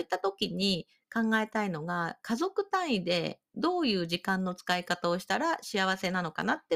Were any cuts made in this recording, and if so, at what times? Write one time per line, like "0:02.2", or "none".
none